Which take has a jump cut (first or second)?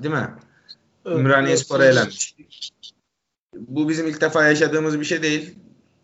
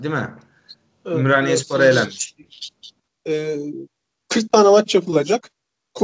second